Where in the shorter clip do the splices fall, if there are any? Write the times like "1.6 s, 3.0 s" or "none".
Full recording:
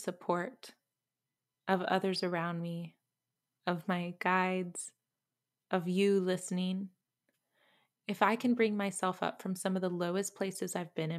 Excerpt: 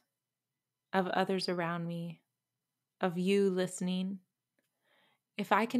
2.8 s